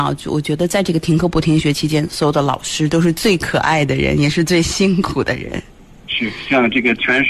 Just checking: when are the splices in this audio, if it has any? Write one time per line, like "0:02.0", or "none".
none